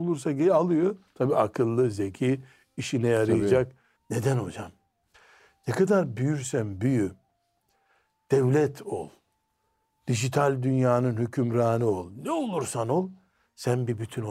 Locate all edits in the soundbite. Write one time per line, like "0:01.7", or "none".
0:04.0